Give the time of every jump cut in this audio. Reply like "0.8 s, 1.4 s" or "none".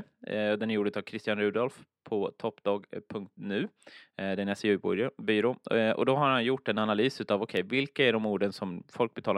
none